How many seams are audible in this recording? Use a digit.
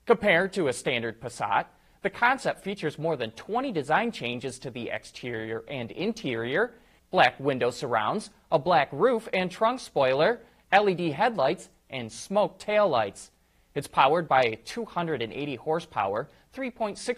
1